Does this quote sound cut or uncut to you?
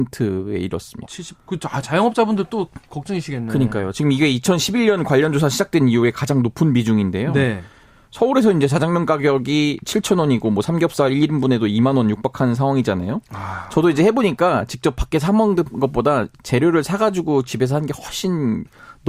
cut